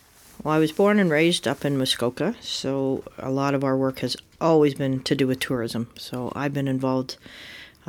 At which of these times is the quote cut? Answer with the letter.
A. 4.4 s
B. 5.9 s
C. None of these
C